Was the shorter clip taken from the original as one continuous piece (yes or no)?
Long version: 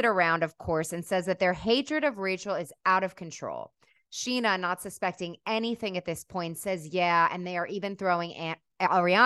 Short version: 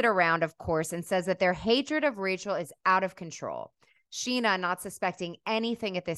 yes